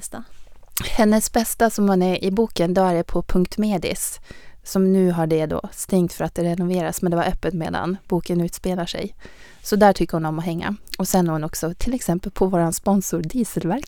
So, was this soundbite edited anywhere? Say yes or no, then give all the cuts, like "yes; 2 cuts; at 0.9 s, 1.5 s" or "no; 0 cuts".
no; 0 cuts